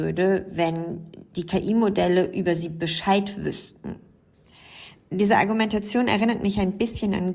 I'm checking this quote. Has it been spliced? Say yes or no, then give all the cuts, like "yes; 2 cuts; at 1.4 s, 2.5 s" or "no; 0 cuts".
no; 0 cuts